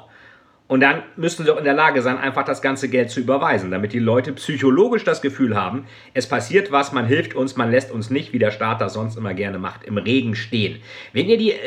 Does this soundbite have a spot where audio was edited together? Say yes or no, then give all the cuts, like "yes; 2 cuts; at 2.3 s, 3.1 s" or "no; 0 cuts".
no; 0 cuts